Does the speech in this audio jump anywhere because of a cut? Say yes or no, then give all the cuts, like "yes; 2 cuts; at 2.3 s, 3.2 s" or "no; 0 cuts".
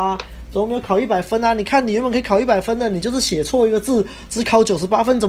no; 0 cuts